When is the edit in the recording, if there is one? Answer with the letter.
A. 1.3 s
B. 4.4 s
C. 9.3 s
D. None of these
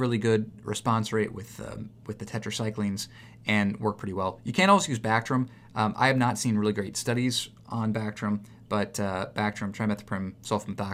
D